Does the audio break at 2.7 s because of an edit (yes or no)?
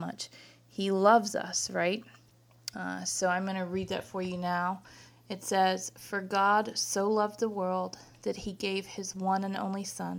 yes